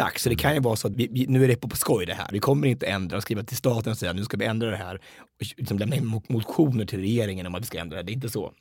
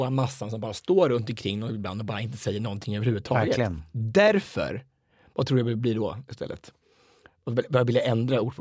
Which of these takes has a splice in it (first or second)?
first